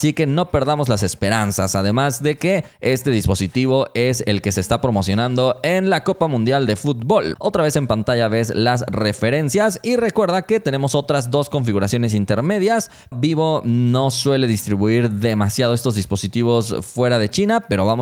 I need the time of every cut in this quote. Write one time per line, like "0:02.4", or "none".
0:07.4
0:13.1